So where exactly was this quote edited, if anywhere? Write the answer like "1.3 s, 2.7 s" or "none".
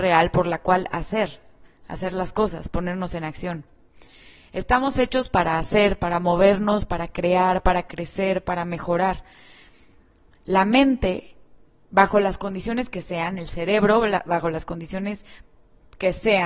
none